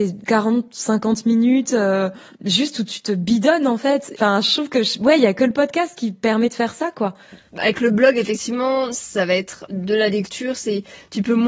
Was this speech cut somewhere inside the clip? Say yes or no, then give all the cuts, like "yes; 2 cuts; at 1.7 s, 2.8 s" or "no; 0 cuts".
no; 0 cuts